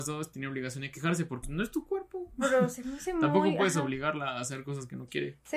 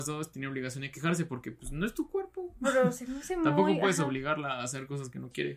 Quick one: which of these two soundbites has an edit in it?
first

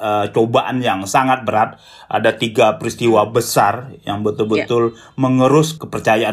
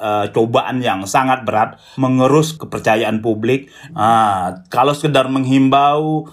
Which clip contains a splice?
second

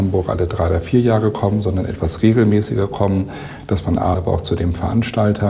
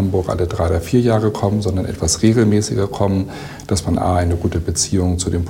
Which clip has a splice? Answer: first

